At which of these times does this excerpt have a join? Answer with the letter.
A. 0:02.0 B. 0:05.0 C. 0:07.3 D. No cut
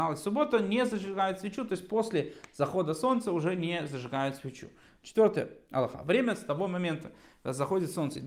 B